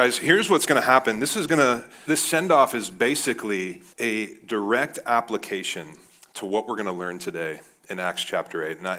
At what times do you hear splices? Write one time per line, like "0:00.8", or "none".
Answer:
0:02.0
0:03.9

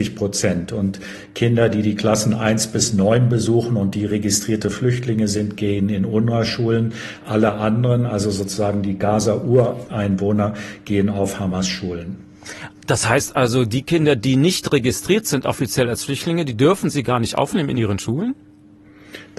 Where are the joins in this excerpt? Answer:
none

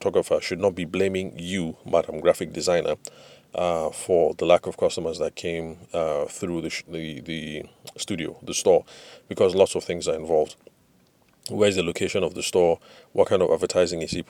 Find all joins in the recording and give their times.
none

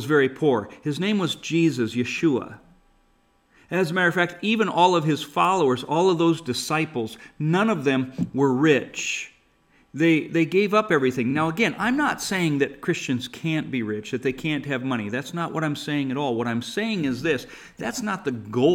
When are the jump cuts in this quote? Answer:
none

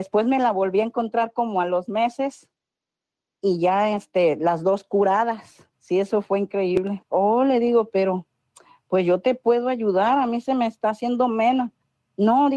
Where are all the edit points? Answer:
0:05.7
0:07.0

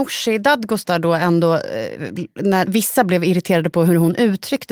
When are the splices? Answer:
0:02.7

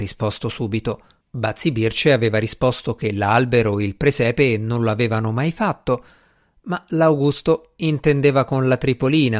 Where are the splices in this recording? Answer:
0:01.2

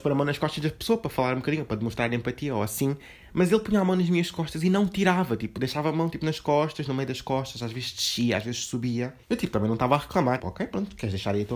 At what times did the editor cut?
0:09.2
0:10.4

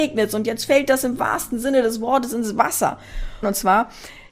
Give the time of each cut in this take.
0:03.4

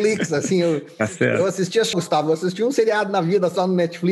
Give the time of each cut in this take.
0:01.9

